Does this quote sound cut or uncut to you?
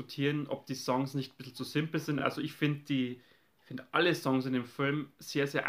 uncut